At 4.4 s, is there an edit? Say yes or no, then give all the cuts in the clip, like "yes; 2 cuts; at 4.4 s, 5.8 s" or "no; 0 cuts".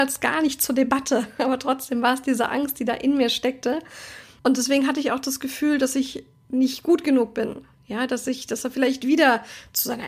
yes; 1 cut; at 4.4 s